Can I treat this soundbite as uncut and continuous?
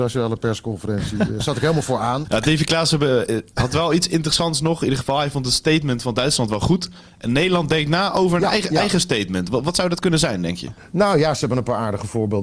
no; 1 cut; at 2.2 s

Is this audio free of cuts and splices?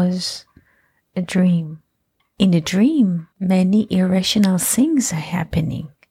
no; 2 cuts; at 2.2 s, 3.3 s

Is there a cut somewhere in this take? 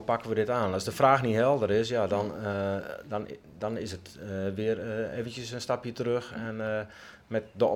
no; 0 cuts

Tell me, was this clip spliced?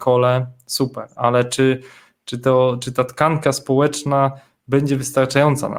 no; 0 cuts

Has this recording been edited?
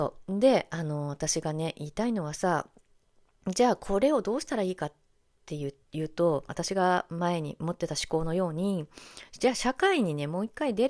yes; 1 cut; at 6.5 s

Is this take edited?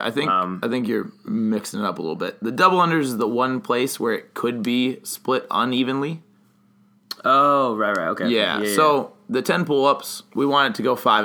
no; 0 cuts

